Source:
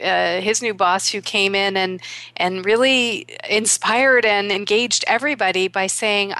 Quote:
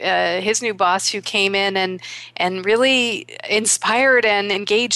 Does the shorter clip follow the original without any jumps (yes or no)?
yes